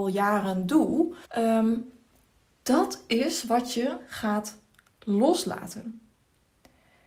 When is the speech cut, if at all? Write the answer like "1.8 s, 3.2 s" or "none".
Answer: 1.2 s